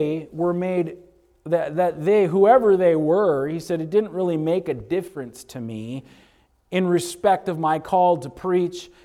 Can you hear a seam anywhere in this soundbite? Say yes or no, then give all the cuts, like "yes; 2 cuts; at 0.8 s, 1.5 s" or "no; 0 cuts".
no; 0 cuts